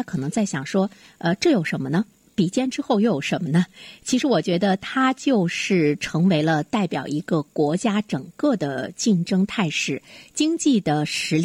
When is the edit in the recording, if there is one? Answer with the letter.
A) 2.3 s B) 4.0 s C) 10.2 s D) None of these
D